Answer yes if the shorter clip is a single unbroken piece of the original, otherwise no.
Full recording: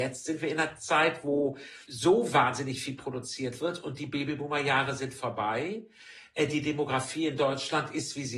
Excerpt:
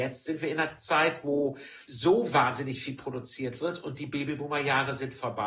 yes